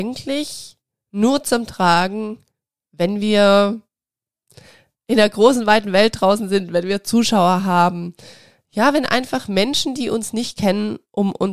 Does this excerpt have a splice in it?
no; 0 cuts

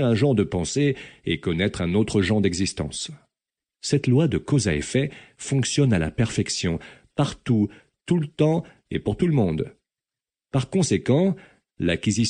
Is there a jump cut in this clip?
no; 0 cuts

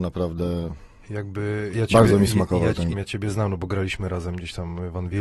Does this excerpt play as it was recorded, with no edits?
no; 2 cuts; at 1.7 s, 2.9 s

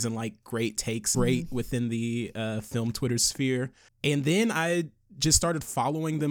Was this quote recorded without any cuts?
no; 2 cuts; at 1.1 s, 3.9 s

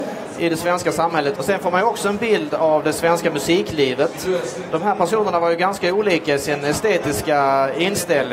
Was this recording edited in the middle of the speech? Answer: yes; 1 cut; at 1.4 s

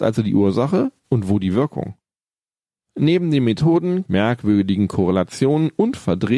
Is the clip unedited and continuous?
no; 1 cut; at 4.1 s

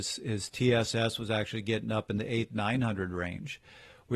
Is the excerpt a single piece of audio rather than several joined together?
yes; 0 cuts

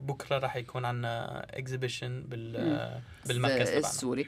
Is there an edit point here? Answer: yes; 1 cut; at 3.3 s

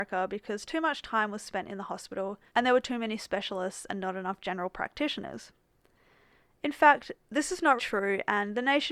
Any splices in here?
yes; 2 cuts; at 2.5 s, 7.8 s

